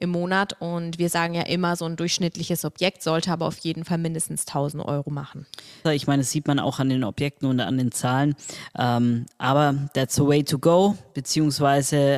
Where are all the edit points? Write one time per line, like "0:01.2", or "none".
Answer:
0:05.8